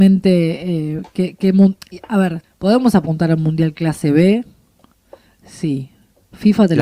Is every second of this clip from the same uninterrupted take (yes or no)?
no